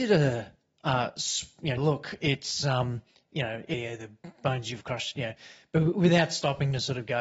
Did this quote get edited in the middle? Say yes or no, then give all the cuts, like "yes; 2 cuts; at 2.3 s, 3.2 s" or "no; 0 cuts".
yes; 2 cuts; at 1.8 s, 3.7 s